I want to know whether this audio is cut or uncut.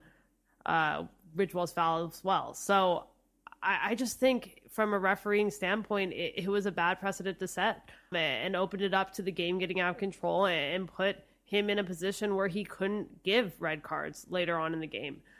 cut